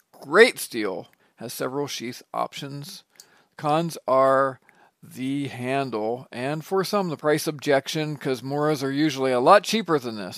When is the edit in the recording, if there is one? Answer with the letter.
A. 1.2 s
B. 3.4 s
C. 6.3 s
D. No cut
A